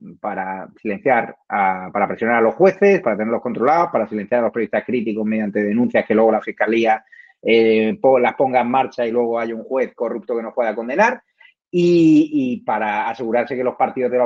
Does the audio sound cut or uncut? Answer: uncut